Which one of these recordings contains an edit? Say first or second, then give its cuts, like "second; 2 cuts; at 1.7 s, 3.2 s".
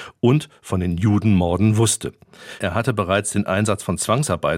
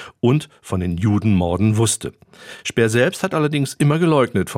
first; 1 cut; at 2.6 s